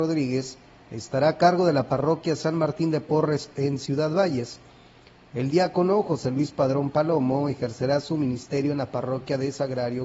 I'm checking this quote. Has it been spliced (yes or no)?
no